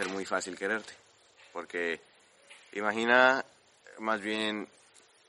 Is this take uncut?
yes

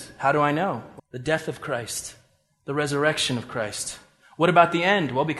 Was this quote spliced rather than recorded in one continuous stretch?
yes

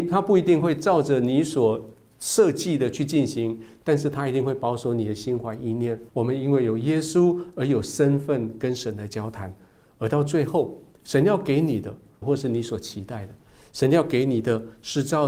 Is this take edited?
yes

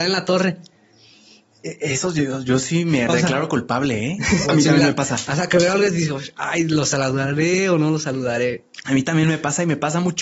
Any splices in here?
yes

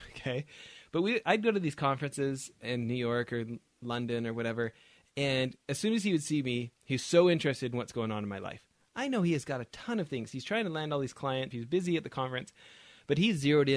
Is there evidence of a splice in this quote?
yes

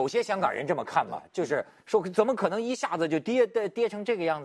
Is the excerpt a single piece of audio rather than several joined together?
yes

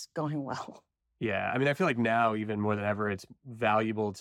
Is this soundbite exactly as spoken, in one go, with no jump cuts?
yes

